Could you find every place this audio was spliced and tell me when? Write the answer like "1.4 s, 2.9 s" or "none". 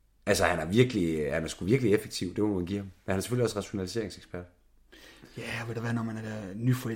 none

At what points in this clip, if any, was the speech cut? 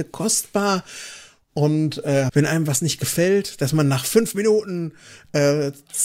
2.3 s

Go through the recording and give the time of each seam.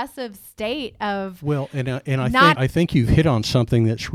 2.6 s

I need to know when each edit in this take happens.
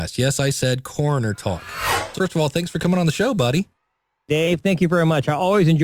2.1 s

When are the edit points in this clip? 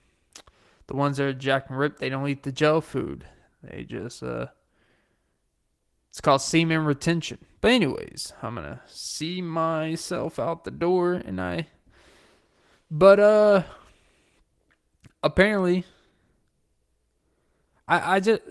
none

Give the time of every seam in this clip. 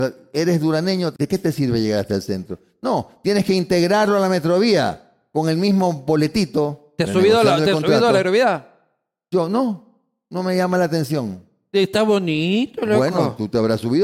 1.1 s

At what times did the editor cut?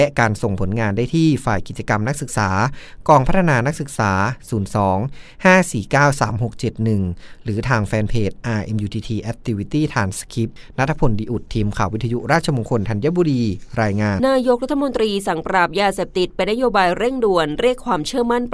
14.2 s

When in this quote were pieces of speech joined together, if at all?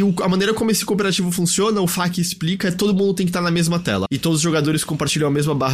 4.1 s

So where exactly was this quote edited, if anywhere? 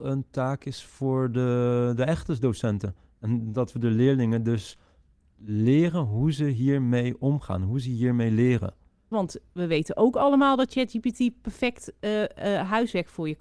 9.1 s

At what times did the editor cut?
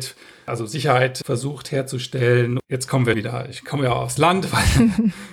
3.1 s

